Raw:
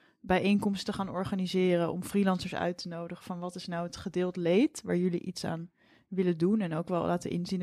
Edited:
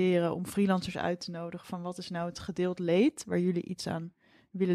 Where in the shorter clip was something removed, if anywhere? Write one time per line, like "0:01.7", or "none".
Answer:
none